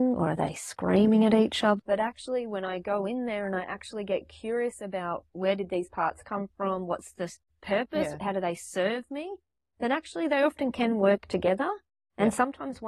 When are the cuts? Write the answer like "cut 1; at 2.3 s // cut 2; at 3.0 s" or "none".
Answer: cut 1; at 1.8 s